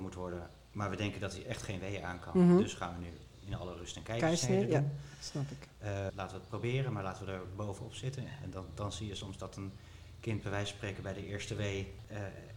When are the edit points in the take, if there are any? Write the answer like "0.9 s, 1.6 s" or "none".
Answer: 6.1 s